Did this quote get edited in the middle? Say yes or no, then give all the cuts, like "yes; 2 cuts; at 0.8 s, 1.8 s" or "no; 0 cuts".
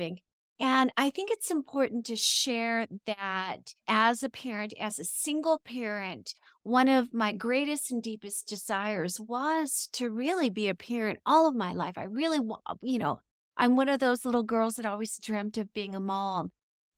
no; 0 cuts